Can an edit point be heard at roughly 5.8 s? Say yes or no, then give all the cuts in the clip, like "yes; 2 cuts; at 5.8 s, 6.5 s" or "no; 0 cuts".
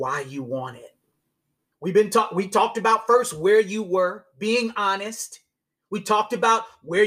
no; 1 cut; at 1.7 s